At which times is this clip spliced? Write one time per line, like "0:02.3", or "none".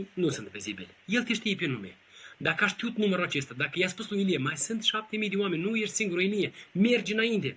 0:01.0